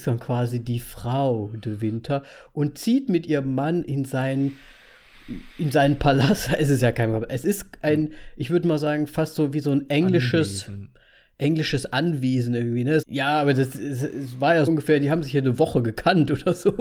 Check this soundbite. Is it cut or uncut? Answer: cut